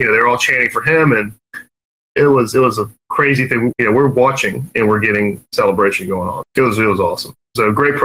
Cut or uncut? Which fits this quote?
cut